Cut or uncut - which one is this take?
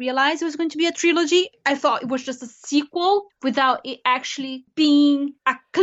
uncut